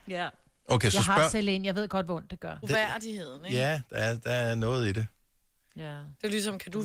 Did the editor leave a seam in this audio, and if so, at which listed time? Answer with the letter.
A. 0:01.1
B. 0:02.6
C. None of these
B